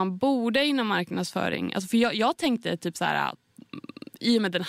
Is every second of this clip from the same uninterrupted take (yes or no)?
yes